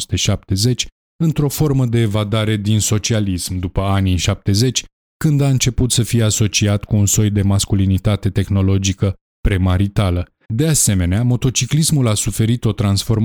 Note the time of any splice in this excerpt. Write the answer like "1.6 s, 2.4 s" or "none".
10.4 s